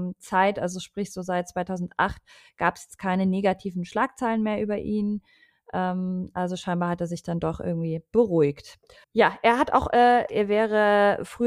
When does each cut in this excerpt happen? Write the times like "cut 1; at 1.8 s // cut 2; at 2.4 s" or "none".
cut 1; at 9.0 s // cut 2; at 10.3 s